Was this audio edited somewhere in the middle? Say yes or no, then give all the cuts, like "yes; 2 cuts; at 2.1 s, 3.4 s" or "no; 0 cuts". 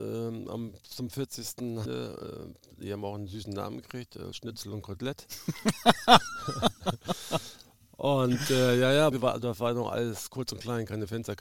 yes; 2 cuts; at 1.9 s, 9.1 s